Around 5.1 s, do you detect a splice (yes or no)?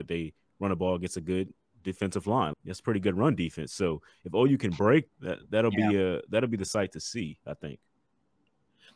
yes